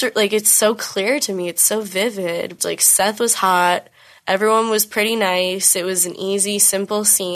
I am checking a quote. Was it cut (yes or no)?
yes